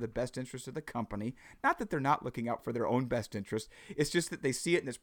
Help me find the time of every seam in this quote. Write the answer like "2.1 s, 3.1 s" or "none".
none